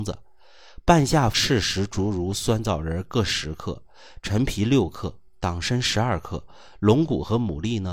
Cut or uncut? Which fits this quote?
cut